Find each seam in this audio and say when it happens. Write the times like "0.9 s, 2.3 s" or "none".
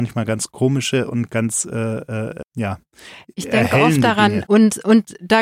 2.4 s, 4.5 s